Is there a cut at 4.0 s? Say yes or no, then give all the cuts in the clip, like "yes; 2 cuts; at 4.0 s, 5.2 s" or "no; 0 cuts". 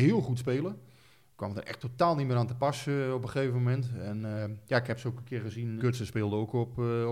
no; 1 cut; at 5.8 s